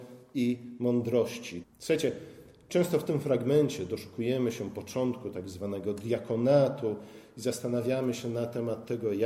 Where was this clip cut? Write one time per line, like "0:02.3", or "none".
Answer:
0:01.6

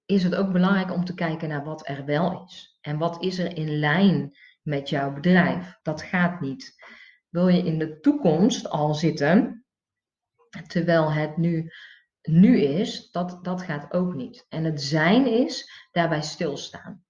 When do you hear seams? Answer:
0:05.8

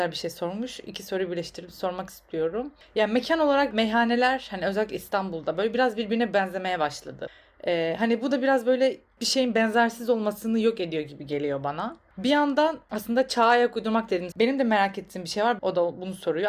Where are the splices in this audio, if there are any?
0:14.3
0:15.6

